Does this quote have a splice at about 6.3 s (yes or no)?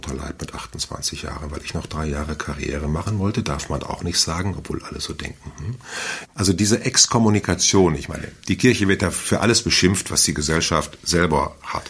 yes